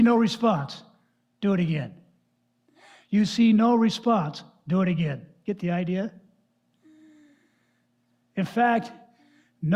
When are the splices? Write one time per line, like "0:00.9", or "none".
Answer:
none